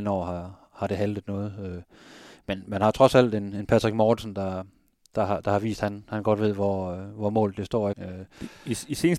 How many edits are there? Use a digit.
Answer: 1